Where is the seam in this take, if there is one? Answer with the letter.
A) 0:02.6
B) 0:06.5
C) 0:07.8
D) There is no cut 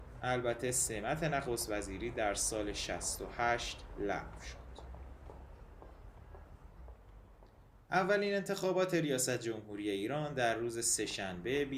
C